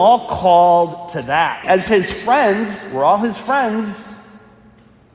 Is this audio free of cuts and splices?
no; 1 cut; at 1.6 s

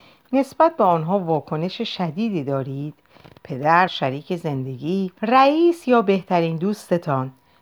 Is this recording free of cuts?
no; 2 cuts; at 3.9 s, 5.2 s

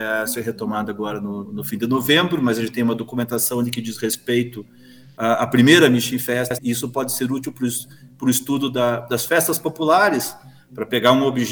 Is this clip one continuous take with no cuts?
no; 2 cuts; at 1.5 s, 6.6 s

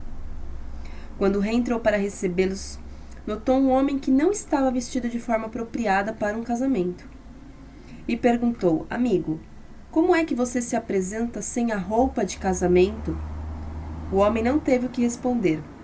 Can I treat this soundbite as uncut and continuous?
yes; 0 cuts

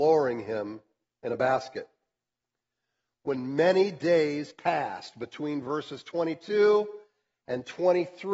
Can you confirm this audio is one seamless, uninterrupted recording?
yes; 0 cuts

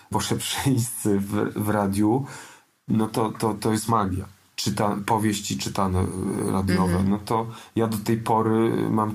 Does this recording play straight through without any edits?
yes; 0 cuts

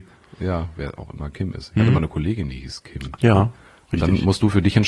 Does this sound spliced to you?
yes; 1 cut; at 3.1 s

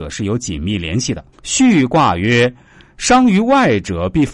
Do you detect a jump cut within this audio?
yes; 1 cut; at 1.3 s

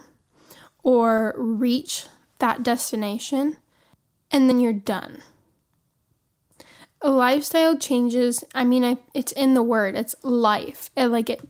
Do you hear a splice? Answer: yes; 1 cut; at 4.5 s

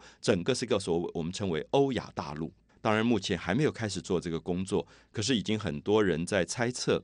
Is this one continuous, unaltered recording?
no; 1 cut; at 2.7 s

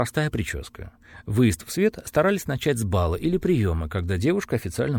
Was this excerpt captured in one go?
yes; 0 cuts

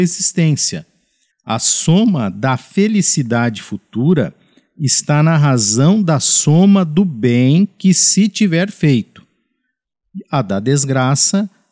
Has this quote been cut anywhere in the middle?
yes; 1 cut; at 1.3 s

